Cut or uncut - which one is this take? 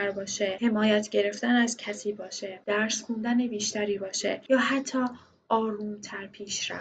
uncut